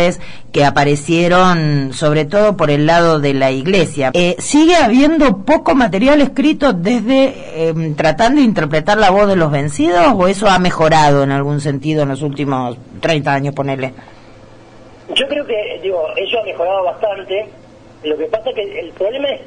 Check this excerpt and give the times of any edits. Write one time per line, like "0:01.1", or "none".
0:04.1